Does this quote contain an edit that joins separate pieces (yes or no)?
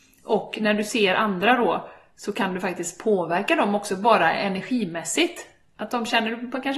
no